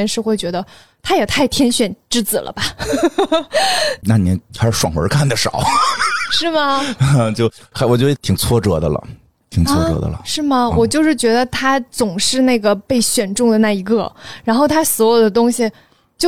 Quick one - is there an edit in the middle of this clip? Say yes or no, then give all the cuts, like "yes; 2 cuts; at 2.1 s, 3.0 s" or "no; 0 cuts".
no; 0 cuts